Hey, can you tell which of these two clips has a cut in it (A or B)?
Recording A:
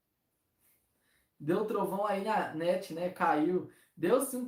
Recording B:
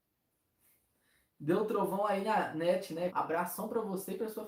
B